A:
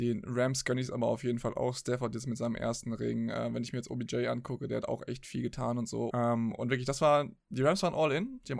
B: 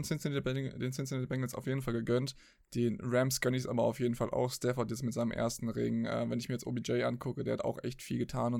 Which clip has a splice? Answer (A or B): A